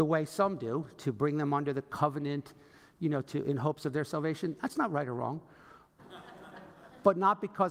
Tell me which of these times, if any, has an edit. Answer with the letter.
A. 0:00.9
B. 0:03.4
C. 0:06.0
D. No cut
C